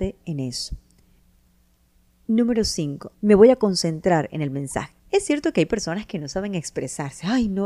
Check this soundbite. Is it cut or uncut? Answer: cut